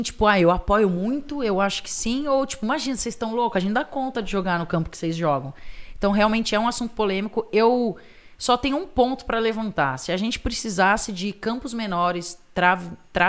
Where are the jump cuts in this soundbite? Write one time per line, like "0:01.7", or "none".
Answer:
none